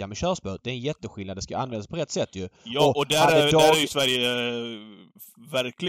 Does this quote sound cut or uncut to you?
uncut